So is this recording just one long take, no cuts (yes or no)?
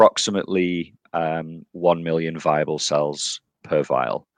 yes